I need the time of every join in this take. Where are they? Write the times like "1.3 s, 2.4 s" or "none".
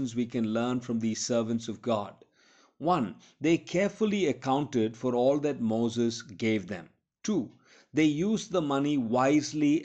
none